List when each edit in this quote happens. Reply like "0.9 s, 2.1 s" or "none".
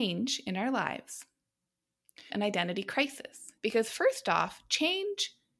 2.3 s, 3.6 s

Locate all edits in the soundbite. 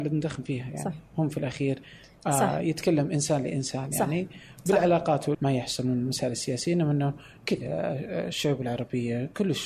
5.3 s

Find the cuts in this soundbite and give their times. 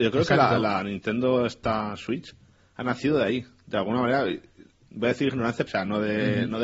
5.7 s

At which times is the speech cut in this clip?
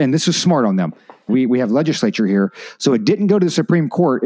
1.3 s

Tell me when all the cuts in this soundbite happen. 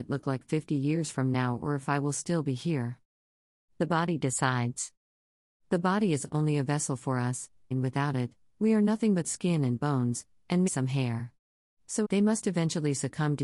7.7 s, 10.7 s, 12.0 s

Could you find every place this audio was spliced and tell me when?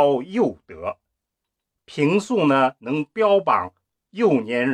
1.7 s

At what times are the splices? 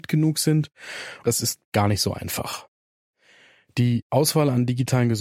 1.2 s

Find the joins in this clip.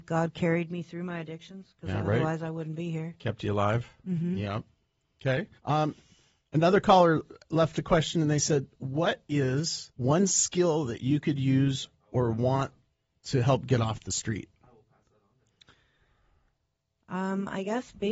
5.6 s, 9.9 s

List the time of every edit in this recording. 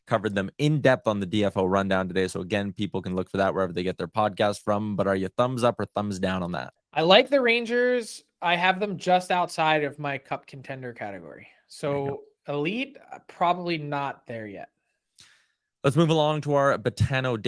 6.8 s

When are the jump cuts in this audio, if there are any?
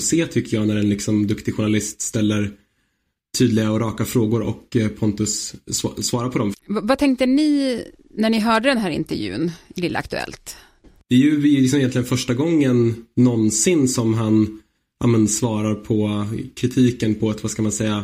6.5 s

